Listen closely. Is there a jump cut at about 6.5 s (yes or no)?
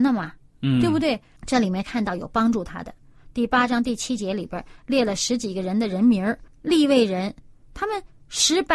yes